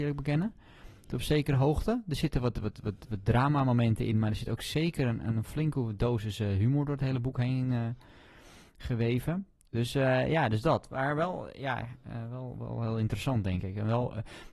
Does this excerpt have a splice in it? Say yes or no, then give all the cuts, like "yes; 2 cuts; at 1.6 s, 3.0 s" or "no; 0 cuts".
no; 0 cuts